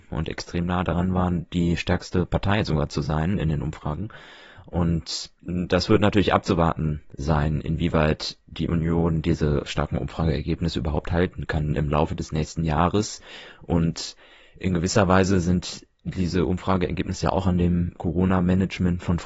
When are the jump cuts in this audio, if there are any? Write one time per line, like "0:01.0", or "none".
none